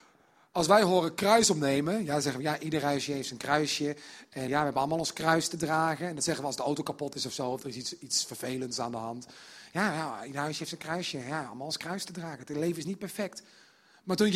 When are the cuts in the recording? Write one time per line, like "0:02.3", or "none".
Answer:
0:04.5